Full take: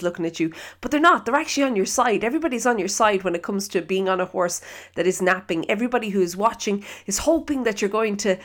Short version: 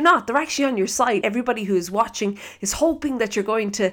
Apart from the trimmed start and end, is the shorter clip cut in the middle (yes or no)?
yes